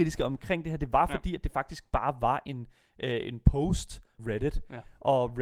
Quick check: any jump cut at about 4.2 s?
yes; 1 cut; at 4.2 s

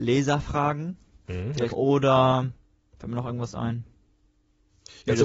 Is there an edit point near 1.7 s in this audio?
yes; 1 cut; at 1.7 s

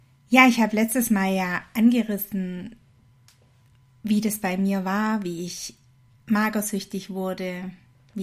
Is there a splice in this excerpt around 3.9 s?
no; 0 cuts

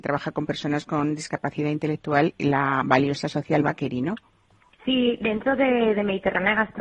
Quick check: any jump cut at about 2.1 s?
no; 1 cut; at 4.7 s

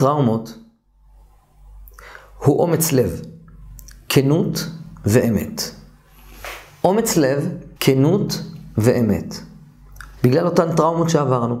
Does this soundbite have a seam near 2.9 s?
no; 2 cuts; at 7.8 s, 10.2 s

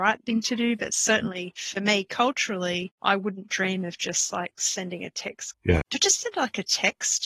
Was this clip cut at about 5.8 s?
yes; 1 cut; at 5.8 s

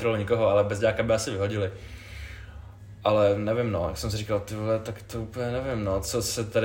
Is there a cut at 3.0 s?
no; 0 cuts

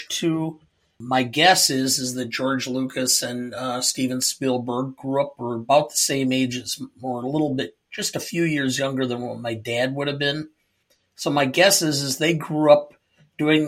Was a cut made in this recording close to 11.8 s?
no; 0 cuts

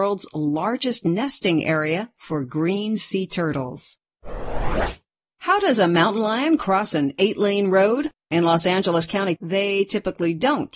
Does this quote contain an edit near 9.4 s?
yes; 1 cut; at 9.4 s

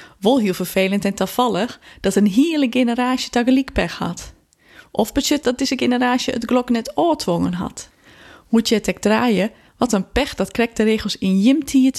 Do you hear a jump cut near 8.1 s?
no; 2 cuts; at 5.4 s, 9.7 s

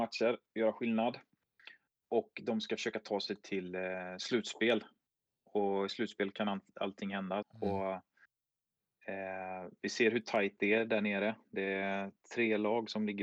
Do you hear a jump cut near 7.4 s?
yes; 1 cut; at 7.4 s

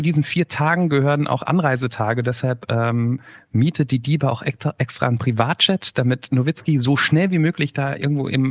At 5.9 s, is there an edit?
no; 0 cuts

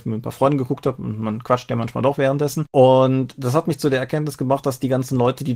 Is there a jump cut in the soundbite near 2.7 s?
no; 0 cuts

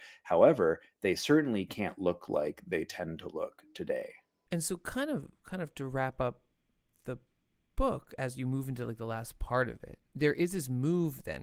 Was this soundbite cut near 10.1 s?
yes; 2 cuts; at 4.5 s, 10.1 s

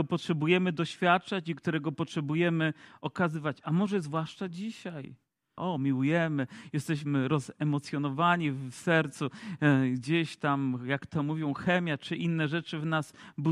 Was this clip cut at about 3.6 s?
no; 1 cut; at 5.6 s

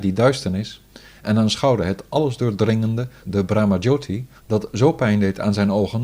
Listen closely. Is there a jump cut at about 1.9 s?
no; 2 cuts; at 3.2 s, 4.4 s

